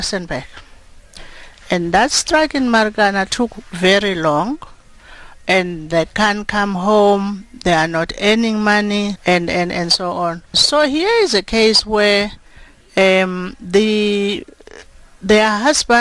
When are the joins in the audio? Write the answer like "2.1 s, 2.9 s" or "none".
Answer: 9.2 s, 10.5 s